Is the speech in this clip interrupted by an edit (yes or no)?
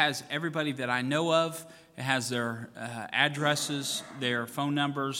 no